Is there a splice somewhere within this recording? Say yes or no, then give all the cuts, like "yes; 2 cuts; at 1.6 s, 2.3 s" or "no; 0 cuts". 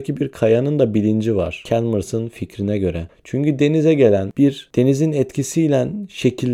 no; 0 cuts